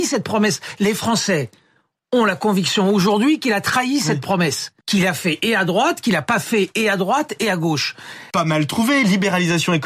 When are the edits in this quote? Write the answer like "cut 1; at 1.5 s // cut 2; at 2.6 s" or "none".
cut 1; at 4.8 s // cut 2; at 8.3 s